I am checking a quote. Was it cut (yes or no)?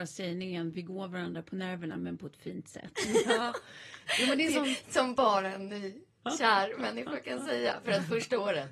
no